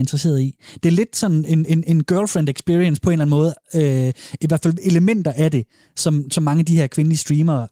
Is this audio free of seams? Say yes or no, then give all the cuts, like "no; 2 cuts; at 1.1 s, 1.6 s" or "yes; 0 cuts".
yes; 0 cuts